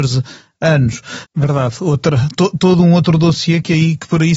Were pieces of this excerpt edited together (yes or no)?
yes